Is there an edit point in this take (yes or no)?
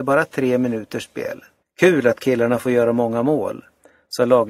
yes